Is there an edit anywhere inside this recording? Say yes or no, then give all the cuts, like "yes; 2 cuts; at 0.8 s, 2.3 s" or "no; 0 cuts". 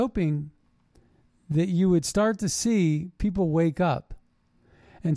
no; 0 cuts